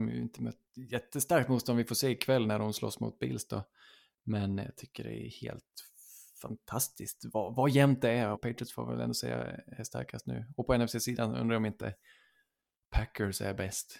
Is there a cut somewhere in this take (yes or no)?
yes